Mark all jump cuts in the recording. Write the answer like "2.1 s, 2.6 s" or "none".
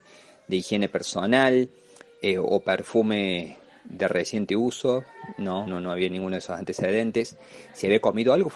5.7 s